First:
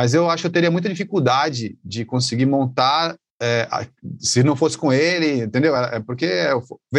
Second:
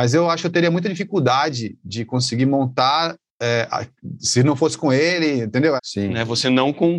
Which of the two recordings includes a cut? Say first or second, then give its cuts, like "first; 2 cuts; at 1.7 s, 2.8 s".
second; 1 cut; at 5.8 s